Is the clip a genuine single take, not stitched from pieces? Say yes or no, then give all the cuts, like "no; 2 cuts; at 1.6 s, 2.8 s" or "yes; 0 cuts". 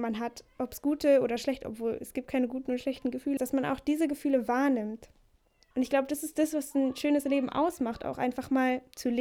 no; 2 cuts; at 3.4 s, 5.7 s